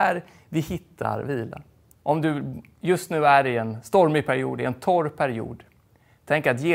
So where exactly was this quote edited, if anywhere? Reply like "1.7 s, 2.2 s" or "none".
1.9 s